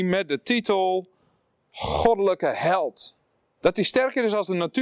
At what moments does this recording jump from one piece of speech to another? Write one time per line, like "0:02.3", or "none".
0:03.6